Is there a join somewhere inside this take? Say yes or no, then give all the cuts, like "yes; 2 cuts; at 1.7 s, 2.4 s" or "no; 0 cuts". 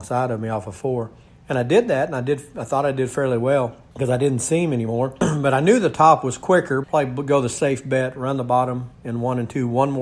yes; 1 cut; at 6.8 s